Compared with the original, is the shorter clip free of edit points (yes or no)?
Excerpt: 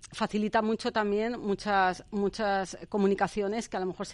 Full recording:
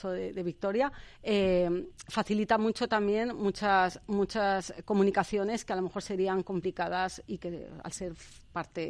yes